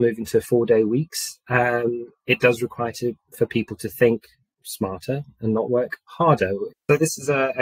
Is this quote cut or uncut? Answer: cut